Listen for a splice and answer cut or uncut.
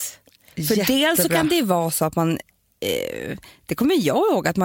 uncut